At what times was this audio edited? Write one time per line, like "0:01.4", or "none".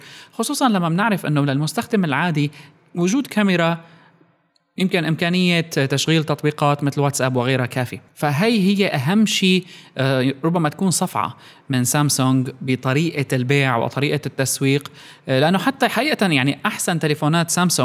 0:08.1

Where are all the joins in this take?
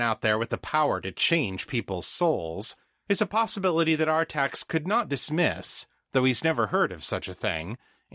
none

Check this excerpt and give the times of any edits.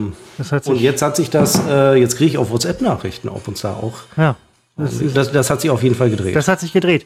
0:05.1

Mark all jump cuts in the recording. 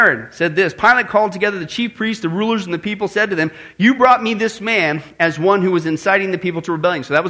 none

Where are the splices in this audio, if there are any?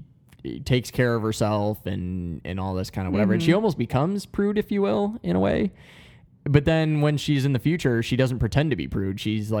none

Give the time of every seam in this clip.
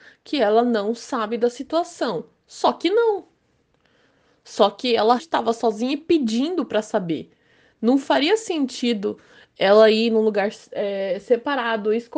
0:05.2

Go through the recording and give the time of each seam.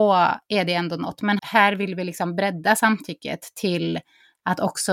0:01.4

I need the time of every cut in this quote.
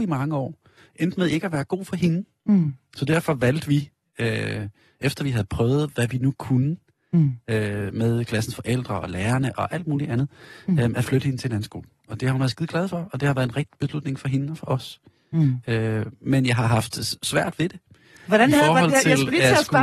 none

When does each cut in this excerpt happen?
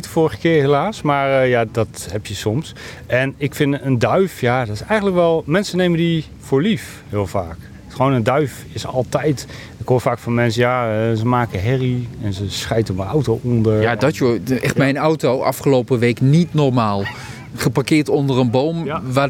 0:01.7

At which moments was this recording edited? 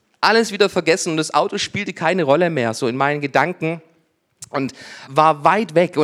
0:05.1

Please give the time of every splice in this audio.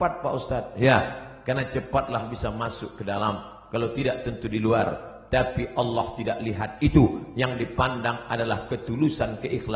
none

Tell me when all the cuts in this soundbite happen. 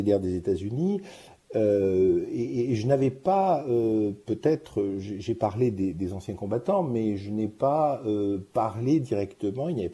none

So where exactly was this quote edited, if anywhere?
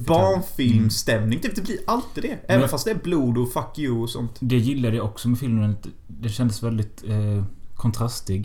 none

